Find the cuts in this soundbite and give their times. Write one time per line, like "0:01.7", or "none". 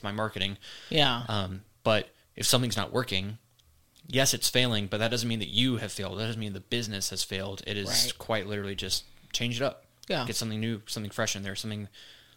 none